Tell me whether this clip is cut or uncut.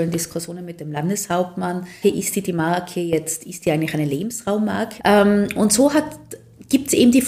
cut